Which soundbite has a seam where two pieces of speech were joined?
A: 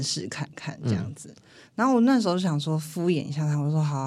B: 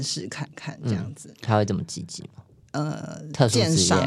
B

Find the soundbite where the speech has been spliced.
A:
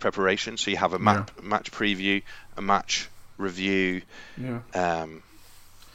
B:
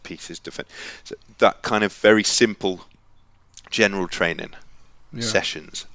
A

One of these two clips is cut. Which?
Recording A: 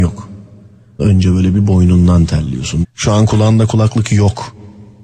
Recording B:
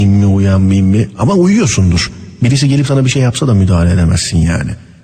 A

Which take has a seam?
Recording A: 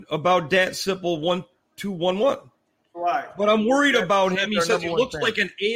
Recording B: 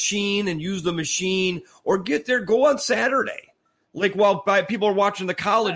A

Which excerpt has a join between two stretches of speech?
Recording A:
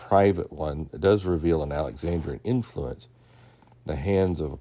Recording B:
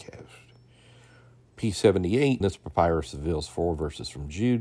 B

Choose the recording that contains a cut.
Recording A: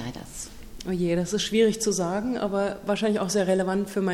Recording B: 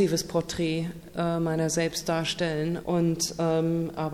B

